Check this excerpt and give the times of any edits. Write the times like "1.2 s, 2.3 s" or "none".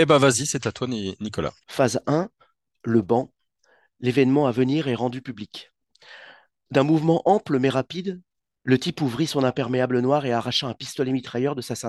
1.6 s